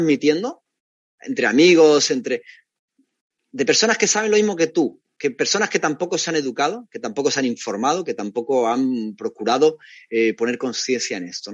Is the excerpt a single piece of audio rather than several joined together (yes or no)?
yes